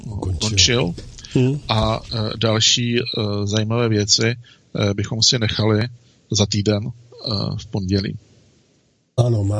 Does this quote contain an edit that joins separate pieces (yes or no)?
no